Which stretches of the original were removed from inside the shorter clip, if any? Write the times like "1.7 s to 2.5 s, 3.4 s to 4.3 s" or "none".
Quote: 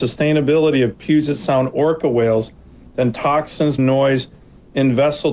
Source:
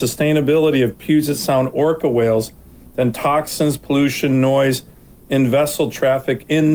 3.8 s to 4.3 s